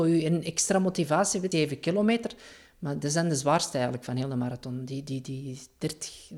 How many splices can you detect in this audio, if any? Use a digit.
1